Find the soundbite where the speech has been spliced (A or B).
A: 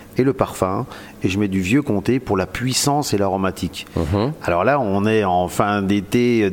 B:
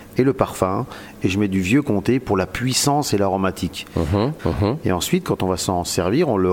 B